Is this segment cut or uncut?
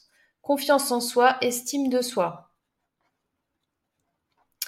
uncut